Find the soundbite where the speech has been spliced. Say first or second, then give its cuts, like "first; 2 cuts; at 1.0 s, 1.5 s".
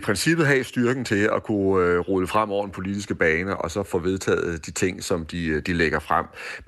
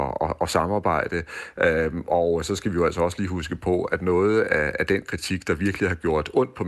first; 1 cut; at 3.8 s